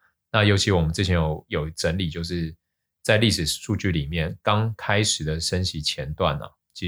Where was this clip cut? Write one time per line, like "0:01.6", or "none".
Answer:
none

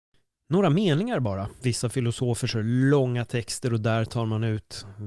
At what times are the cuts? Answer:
0:01.6

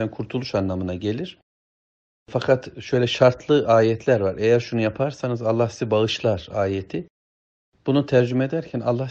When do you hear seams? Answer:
none

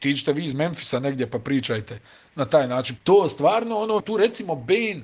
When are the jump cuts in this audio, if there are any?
0:03.0
0:04.0

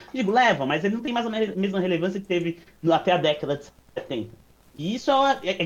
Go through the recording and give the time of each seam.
none

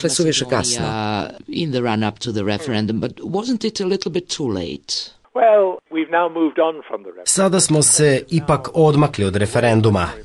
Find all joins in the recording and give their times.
none

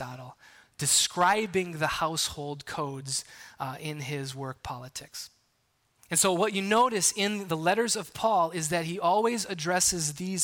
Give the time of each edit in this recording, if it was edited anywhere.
0:06.0

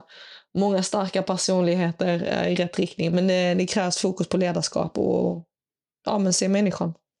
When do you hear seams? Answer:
none

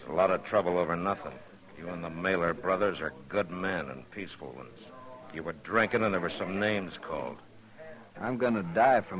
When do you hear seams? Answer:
0:08.1

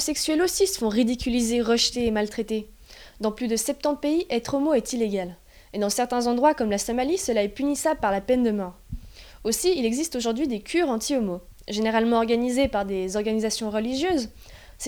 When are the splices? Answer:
none

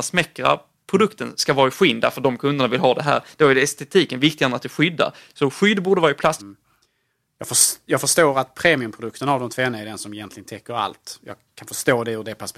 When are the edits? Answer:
0:06.4

